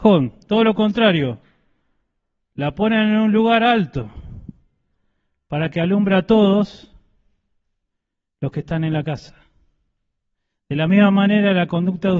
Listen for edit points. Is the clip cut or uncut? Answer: uncut